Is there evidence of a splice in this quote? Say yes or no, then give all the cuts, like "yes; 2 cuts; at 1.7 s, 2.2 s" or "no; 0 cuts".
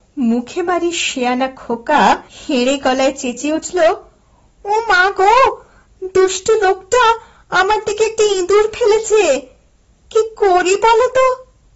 yes; 1 cut; at 2.3 s